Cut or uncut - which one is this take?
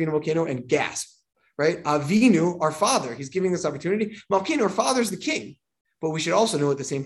uncut